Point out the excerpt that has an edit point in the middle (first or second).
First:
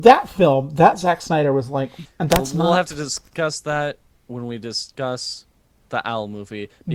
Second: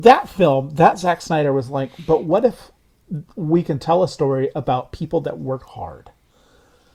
first